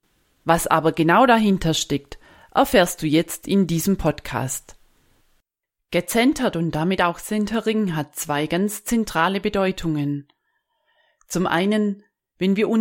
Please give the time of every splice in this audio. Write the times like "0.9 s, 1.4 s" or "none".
none